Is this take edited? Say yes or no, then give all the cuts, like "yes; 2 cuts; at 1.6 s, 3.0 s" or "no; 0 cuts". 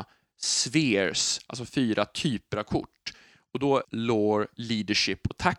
yes; 1 cut; at 3.8 s